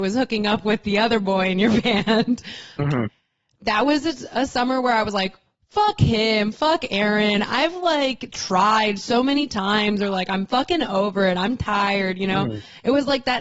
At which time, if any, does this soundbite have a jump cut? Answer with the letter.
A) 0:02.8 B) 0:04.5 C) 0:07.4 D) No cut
A